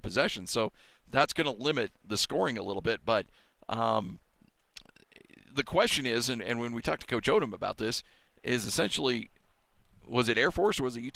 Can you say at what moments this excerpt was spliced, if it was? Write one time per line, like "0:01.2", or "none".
none